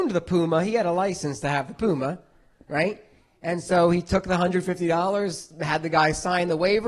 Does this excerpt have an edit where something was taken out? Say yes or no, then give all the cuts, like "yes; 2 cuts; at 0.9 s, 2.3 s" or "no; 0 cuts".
no; 0 cuts